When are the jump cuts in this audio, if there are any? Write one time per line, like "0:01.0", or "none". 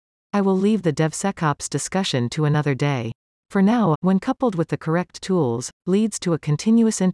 0:03.9